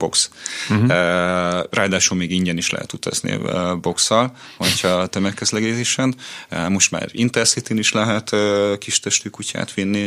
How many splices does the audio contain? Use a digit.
0